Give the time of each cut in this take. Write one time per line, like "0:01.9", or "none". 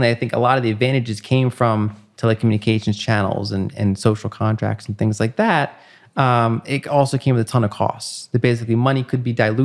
none